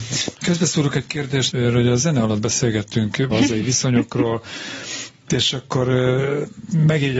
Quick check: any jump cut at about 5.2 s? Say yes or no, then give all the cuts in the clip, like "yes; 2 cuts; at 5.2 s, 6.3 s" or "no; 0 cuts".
no; 2 cuts; at 1.5 s, 3.3 s